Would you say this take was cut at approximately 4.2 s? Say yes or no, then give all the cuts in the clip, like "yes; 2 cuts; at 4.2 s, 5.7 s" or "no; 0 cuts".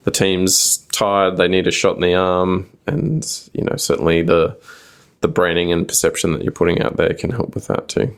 no; 1 cut; at 2.7 s